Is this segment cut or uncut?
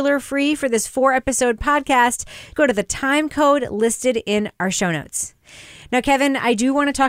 cut